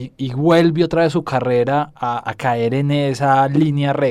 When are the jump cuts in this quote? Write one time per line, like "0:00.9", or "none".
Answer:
none

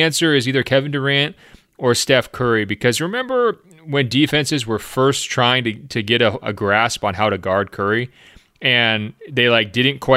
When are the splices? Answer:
0:06.4

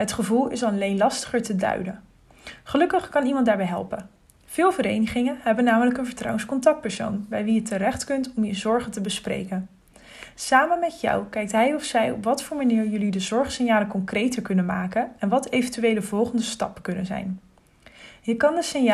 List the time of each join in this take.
none

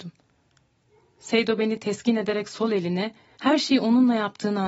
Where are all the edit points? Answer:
0:03.4

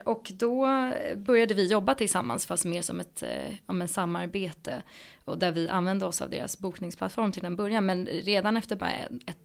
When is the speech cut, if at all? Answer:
none

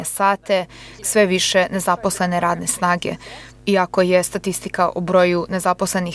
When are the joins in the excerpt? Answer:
0:01.0
0:03.5

